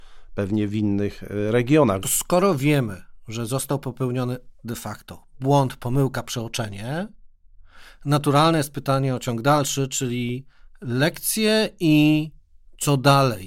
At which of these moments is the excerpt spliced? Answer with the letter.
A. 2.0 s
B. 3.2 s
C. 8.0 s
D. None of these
A